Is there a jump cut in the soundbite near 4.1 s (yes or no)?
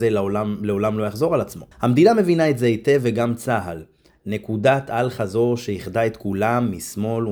no